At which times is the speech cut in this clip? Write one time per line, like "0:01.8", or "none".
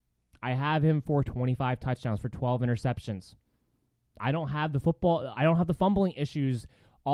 none